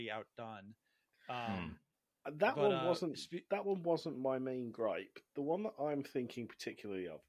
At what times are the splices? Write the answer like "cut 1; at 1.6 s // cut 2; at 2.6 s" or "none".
none